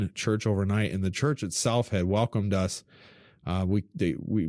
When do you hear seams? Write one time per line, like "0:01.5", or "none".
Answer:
none